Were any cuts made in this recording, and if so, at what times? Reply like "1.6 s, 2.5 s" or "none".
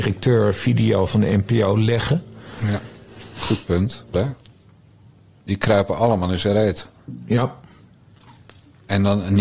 4.1 s